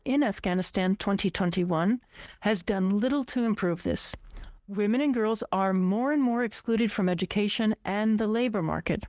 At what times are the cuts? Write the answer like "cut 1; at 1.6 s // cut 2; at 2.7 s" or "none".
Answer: cut 1; at 4.6 s